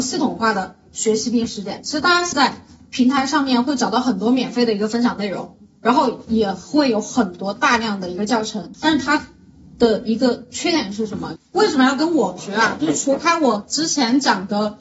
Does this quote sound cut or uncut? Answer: cut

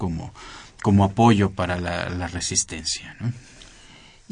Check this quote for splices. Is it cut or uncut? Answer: cut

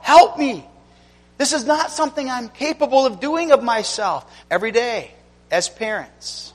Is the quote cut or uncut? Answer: cut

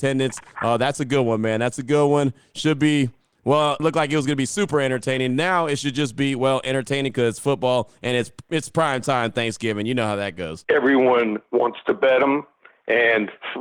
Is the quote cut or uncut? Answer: cut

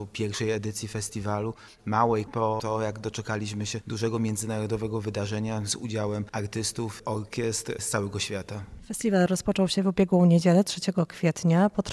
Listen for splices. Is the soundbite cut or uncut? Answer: cut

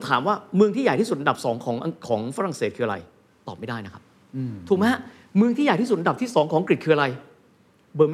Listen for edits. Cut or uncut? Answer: uncut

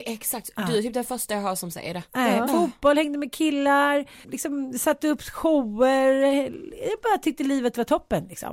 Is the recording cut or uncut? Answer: cut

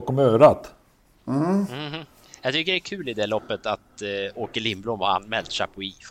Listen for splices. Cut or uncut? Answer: uncut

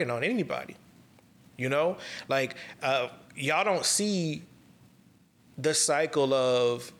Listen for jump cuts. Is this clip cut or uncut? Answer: uncut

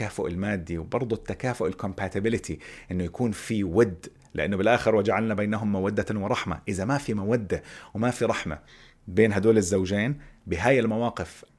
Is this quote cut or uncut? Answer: uncut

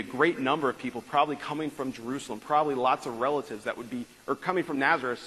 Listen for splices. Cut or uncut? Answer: uncut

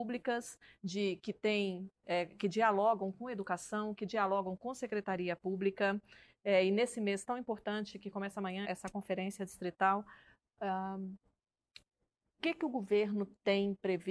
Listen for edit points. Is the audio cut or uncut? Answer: cut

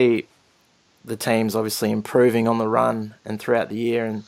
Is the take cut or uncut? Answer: uncut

